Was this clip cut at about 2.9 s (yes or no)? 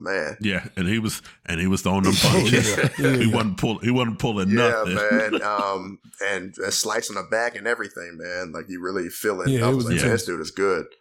no